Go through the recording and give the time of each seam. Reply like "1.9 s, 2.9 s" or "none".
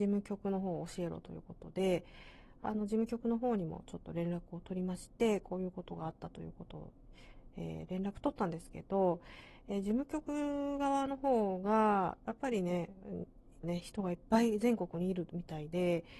13.6 s